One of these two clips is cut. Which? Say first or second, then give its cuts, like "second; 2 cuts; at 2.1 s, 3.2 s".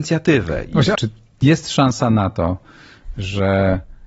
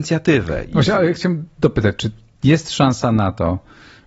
first; 1 cut; at 1.0 s